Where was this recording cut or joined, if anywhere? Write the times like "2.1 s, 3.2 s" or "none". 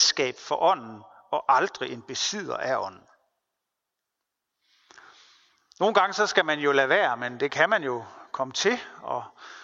none